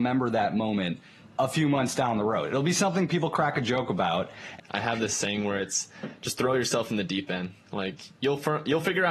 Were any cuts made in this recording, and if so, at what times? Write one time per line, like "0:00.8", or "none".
0:04.6